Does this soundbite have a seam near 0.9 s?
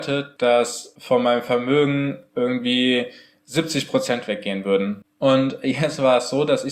no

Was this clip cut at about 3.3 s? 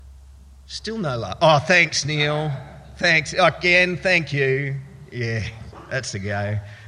no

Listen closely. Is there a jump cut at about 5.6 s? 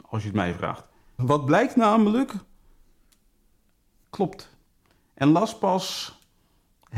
no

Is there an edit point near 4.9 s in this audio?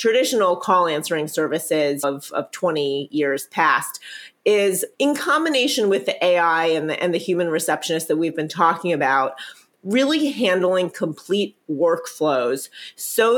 yes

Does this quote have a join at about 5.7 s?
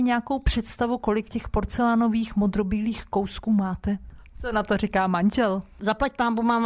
no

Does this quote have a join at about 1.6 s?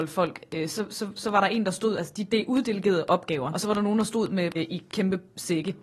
no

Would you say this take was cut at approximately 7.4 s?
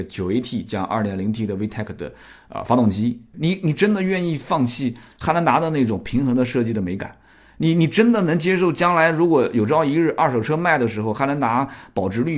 no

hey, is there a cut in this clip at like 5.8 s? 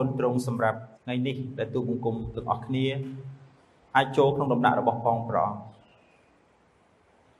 no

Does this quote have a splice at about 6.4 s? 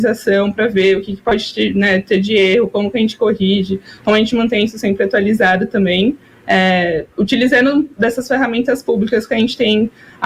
no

